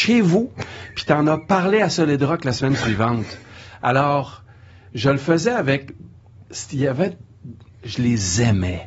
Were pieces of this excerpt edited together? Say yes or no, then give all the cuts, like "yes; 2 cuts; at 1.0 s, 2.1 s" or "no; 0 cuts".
no; 0 cuts